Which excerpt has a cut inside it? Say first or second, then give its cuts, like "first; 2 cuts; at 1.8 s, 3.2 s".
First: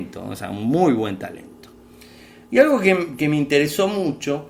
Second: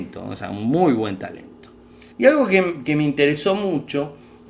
second; 1 cut; at 2.1 s